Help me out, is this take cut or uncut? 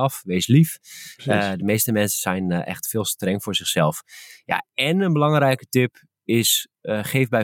uncut